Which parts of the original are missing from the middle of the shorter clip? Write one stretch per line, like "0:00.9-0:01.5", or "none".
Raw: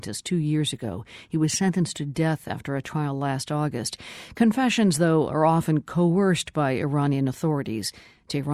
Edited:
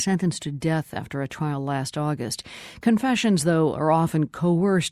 none